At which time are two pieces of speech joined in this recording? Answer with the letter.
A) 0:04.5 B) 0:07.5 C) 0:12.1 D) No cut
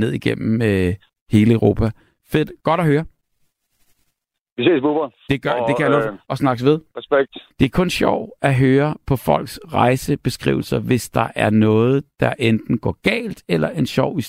B